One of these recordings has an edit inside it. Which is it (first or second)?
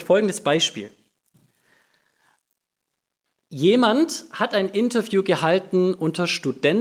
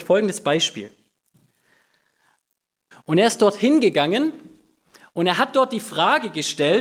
second